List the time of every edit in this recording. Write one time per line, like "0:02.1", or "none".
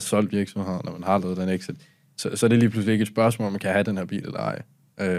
none